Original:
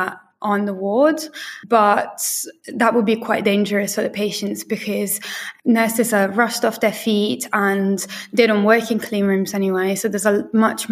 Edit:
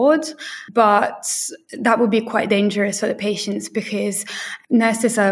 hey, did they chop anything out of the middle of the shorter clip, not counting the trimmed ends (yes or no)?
no